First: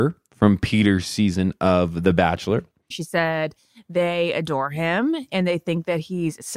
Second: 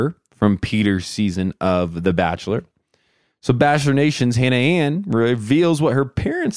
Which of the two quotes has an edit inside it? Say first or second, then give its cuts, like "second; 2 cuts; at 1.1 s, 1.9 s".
first; 1 cut; at 2.9 s